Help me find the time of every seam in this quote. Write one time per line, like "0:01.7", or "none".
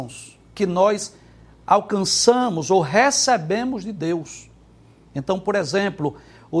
none